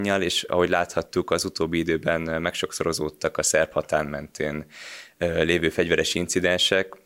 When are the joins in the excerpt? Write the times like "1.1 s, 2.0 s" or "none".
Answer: none

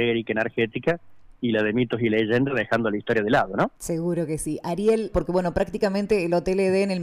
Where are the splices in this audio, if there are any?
3.7 s, 5.1 s

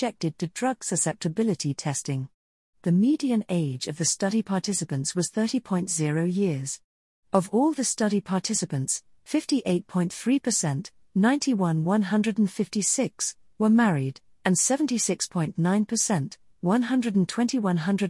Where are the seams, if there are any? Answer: 2.7 s

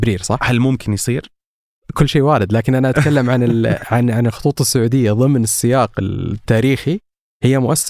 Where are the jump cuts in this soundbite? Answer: none

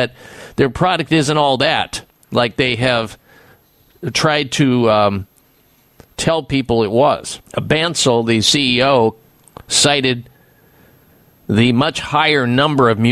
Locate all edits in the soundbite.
7.5 s

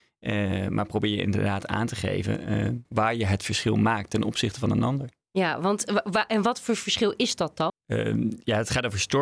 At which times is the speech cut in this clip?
2.9 s, 7.7 s

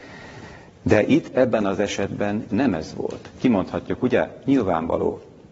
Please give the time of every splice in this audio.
none

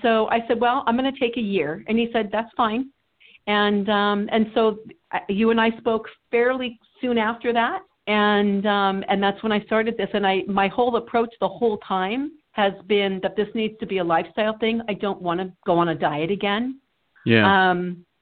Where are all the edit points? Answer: 12.4 s

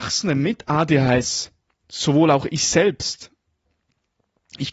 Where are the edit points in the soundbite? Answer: none

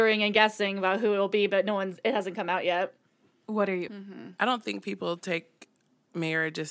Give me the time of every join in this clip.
3.9 s

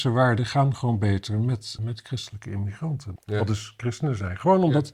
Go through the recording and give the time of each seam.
1.8 s, 3.2 s

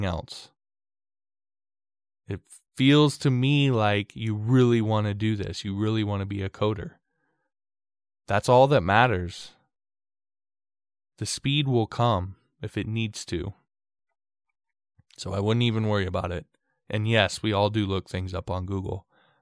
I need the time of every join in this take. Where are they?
none

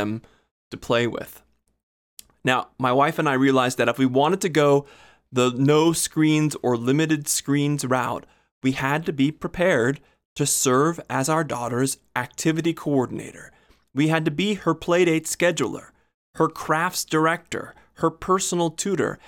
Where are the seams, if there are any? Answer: none

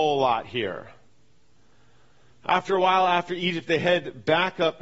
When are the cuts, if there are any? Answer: none

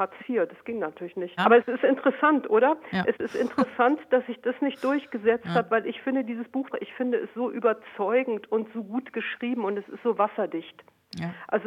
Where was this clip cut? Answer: 1.4 s, 6.7 s

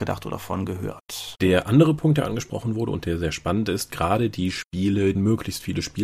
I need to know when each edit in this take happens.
1.4 s, 5.1 s

